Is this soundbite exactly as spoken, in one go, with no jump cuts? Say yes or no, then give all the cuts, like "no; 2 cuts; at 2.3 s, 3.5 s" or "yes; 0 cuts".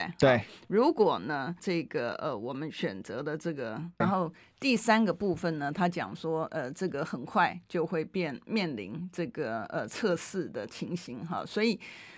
no; 2 cuts; at 1.6 s, 4.0 s